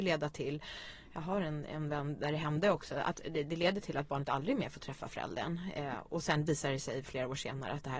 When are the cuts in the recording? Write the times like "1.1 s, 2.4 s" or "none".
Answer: none